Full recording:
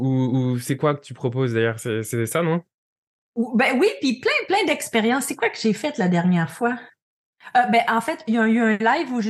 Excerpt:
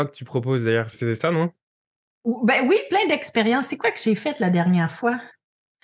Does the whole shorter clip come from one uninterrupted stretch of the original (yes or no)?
no